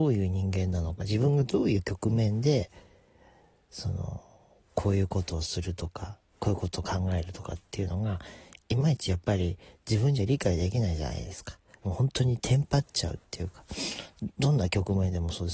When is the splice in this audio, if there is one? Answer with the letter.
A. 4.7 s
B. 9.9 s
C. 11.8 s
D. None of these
C